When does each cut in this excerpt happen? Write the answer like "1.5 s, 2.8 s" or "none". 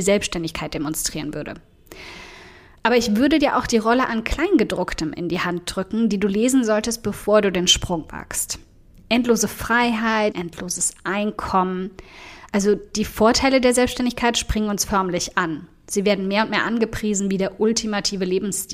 10.3 s